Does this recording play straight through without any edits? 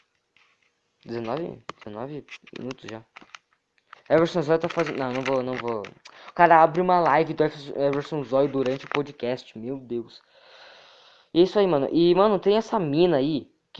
yes; 0 cuts

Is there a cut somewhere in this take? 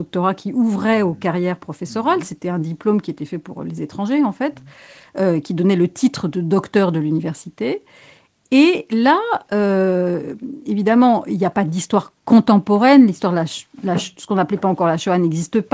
no; 0 cuts

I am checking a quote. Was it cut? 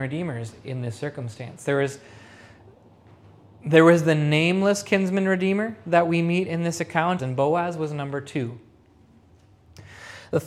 yes; 1 cut; at 7.2 s

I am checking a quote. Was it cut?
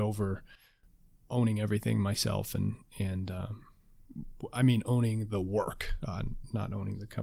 no; 0 cuts

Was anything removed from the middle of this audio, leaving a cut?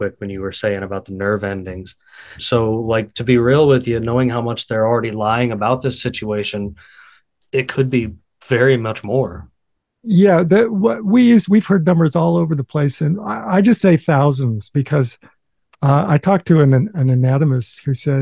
yes; 1 cut; at 2.4 s

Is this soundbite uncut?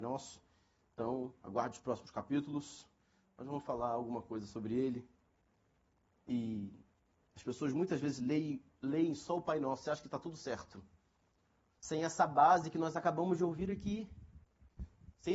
yes; 0 cuts

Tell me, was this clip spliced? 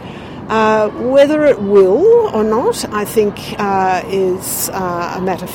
no; 0 cuts

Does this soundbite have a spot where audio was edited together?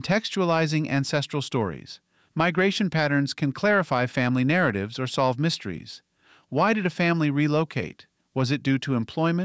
no; 0 cuts

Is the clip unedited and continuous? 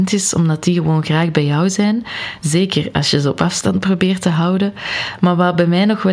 yes; 0 cuts

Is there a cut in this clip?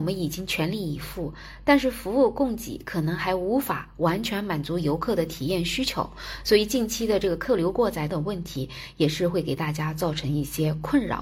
yes; 1 cut; at 8.1 s

